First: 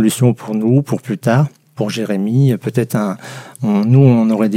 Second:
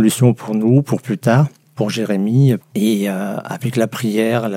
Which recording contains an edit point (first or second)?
second